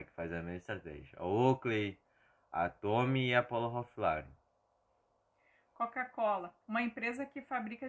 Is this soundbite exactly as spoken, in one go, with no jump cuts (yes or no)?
no